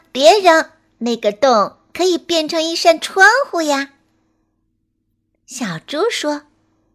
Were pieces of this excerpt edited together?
no; 0 cuts

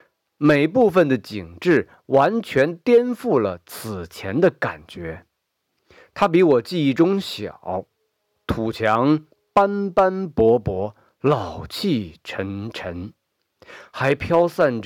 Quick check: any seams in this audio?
no; 0 cuts

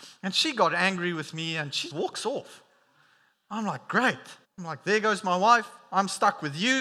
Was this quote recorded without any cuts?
no; 2 cuts; at 1.9 s, 4.4 s

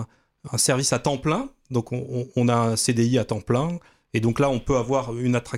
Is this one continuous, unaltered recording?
yes; 0 cuts

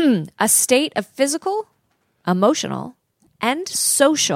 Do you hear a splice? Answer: yes; 1 cut; at 3.3 s

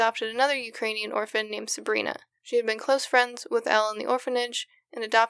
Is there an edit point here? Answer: no; 0 cuts

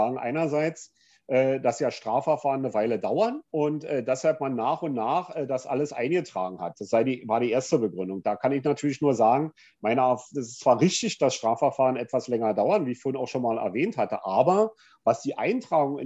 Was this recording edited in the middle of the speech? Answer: yes; 1 cut; at 3.5 s

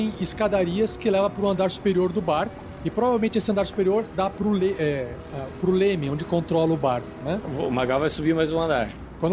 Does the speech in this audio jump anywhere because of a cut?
no; 0 cuts

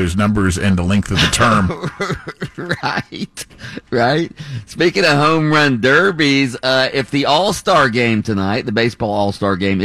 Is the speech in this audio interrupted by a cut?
no; 0 cuts

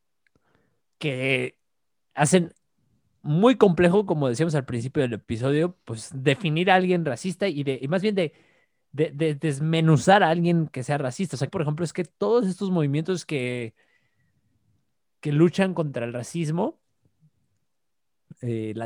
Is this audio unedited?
no; 1 cut; at 11.5 s

